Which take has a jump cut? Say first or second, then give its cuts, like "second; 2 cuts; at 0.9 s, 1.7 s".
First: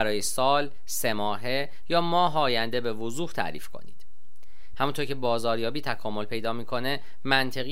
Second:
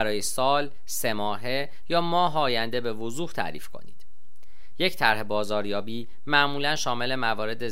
first; 1 cut; at 4.7 s